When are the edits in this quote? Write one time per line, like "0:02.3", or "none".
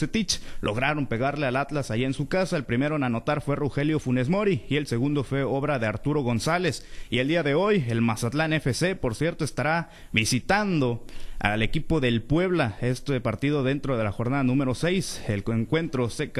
none